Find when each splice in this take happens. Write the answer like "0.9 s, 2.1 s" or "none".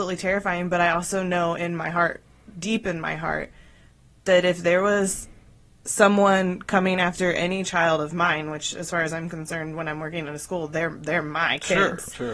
none